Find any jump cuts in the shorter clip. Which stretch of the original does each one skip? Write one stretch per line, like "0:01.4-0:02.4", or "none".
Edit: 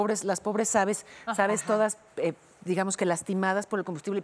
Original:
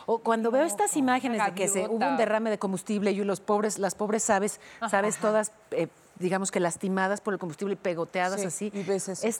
none